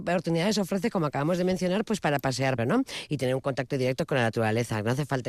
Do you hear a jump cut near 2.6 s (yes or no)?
yes